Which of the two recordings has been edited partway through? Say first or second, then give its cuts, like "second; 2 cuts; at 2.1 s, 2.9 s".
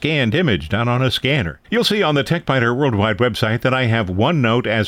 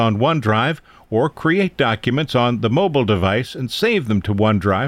first; 1 cut; at 1.6 s